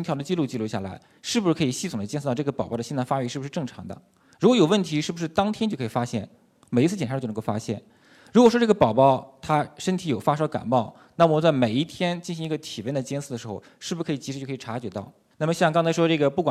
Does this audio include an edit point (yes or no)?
no